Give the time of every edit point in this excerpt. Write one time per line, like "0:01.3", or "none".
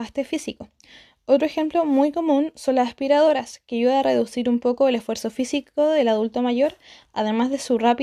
none